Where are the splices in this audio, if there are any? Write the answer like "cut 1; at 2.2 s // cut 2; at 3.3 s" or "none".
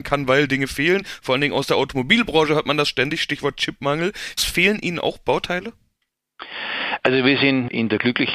cut 1; at 4.4 s

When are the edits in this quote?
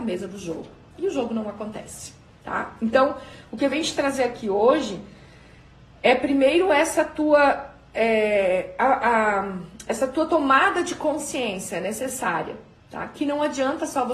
none

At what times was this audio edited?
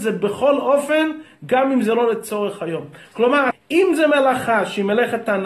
cut 1; at 3.5 s

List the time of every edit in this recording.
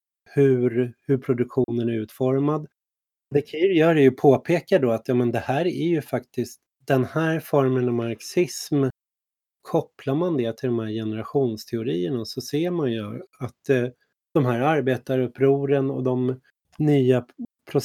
cut 1; at 3.3 s // cut 2; at 9.5 s

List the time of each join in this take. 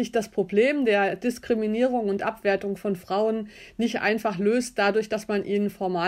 none

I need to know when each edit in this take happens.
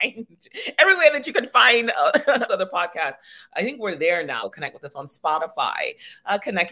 cut 1; at 2.5 s // cut 2; at 4.4 s

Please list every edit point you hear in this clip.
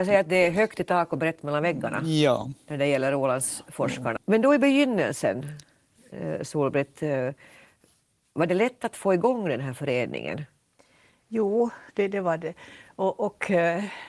cut 1; at 4.2 s

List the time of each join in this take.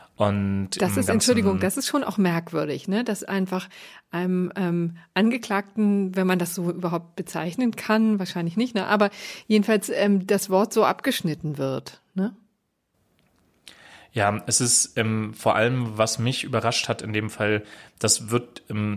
none

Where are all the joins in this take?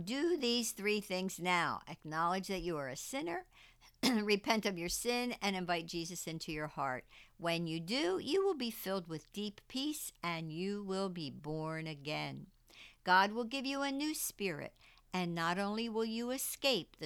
none

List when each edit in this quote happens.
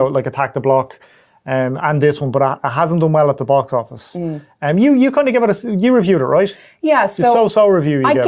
cut 1; at 1.8 s

